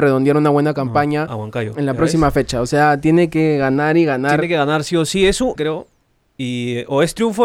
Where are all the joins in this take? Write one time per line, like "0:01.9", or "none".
0:01.3
0:05.6